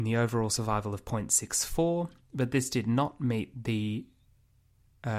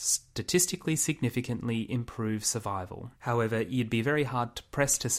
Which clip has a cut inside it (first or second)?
second